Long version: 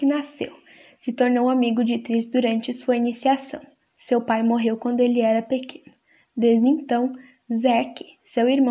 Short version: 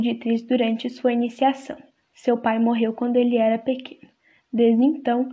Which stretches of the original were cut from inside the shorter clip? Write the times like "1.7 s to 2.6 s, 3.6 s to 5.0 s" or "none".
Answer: none